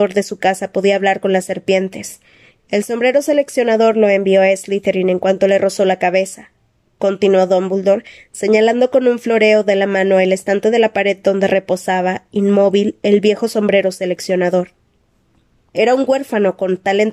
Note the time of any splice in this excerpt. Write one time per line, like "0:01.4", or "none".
0:02.6
0:15.7